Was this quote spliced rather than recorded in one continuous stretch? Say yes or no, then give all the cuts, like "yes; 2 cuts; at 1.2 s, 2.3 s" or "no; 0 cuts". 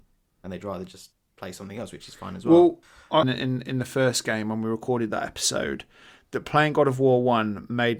yes; 1 cut; at 3.2 s